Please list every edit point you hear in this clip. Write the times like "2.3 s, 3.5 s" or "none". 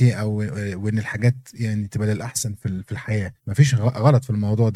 3.4 s